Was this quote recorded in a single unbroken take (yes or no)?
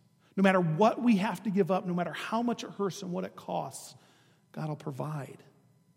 yes